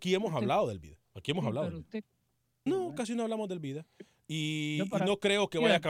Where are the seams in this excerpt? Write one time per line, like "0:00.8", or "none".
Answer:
0:01.1
0:02.7